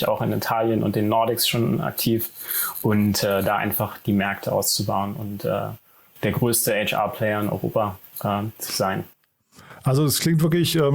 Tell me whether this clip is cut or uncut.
uncut